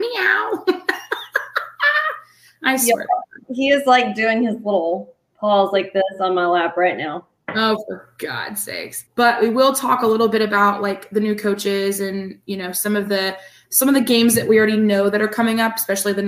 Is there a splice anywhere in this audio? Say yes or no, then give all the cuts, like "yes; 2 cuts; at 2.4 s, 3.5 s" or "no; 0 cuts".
yes; 1 cut; at 9.1 s